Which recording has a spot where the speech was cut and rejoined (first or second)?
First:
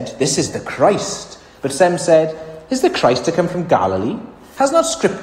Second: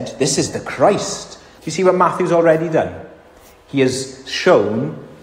second